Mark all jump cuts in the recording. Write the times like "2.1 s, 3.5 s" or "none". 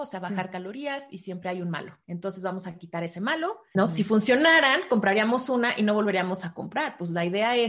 2.0 s, 3.7 s